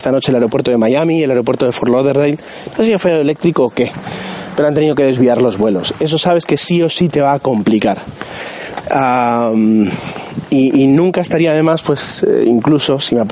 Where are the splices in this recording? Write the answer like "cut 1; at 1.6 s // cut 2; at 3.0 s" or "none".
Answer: cut 1; at 8.8 s